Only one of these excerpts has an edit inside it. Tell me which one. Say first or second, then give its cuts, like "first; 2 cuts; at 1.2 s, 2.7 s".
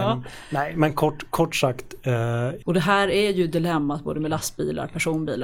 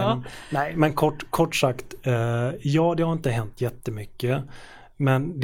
first; 1 cut; at 2.6 s